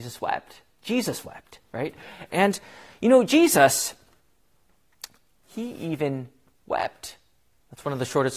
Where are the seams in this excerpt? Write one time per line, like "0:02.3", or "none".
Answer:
0:02.3
0:05.4